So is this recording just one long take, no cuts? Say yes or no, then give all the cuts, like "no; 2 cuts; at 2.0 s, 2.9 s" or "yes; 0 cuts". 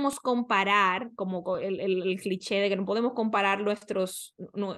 yes; 0 cuts